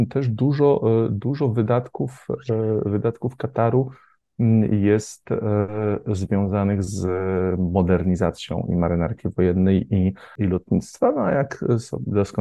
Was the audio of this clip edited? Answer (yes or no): no